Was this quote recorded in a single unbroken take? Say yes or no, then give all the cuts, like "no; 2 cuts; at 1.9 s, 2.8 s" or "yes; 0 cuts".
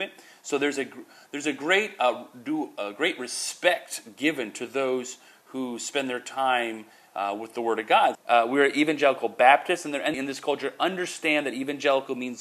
no; 2 cuts; at 8.1 s, 10.1 s